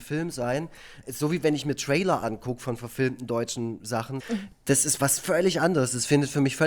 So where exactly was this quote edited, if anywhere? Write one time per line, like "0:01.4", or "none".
0:01.0
0:04.2